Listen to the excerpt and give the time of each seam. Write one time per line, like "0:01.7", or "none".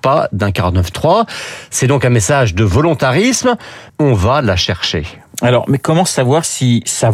0:03.9